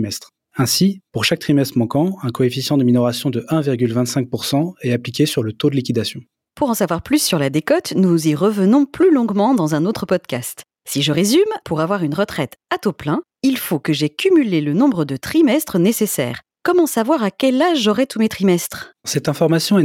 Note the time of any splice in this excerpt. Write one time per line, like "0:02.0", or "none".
none